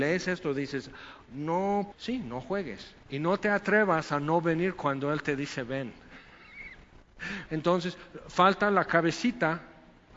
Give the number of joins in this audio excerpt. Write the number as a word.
three